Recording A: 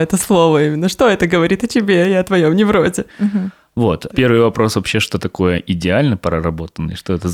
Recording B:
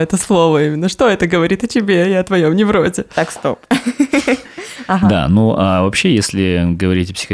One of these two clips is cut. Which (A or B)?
A